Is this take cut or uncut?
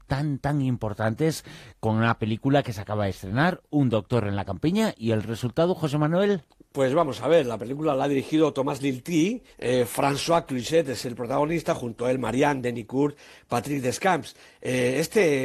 cut